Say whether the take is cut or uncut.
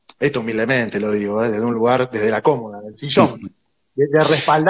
uncut